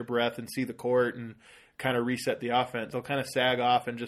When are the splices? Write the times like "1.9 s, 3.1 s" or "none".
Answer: 2.9 s